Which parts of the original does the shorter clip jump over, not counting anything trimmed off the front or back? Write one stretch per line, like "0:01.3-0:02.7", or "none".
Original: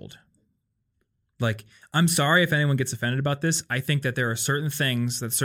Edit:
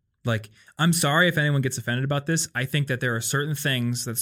none